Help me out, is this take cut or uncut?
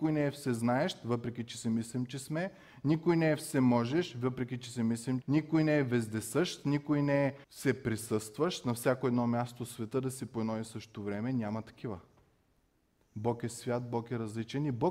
cut